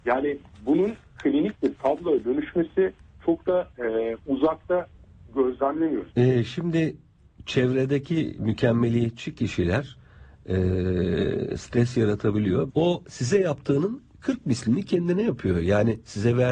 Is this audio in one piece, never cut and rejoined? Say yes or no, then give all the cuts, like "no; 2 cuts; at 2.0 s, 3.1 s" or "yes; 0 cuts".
no; 2 cuts; at 6.1 s, 12.7 s